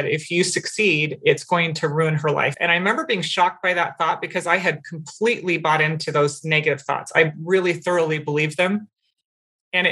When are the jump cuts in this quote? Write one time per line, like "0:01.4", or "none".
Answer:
0:02.5